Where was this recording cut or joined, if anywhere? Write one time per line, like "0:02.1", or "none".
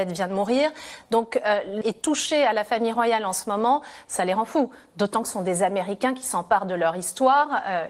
0:01.8

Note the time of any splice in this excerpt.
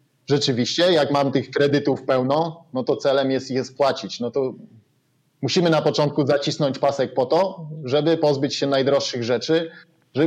none

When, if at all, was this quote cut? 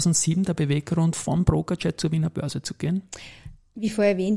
none

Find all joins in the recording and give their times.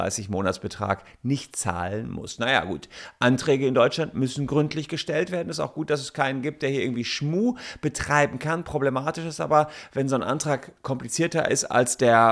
none

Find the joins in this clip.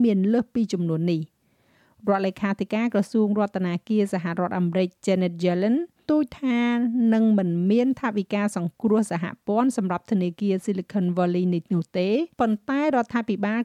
0:06.1
0:12.3

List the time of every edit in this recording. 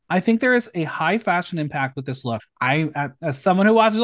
0:02.4

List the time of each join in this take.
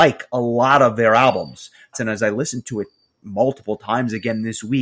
0:01.9

